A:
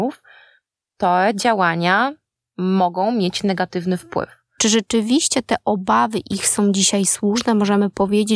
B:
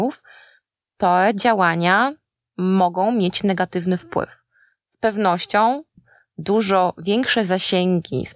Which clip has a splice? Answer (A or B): A